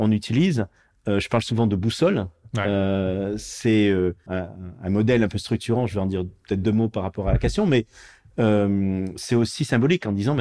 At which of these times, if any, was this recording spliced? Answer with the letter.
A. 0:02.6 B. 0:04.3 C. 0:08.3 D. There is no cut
B